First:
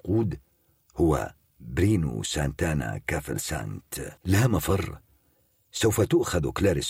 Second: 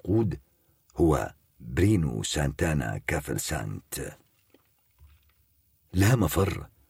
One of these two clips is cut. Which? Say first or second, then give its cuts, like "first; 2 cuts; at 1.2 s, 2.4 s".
first; 1 cut; at 4.2 s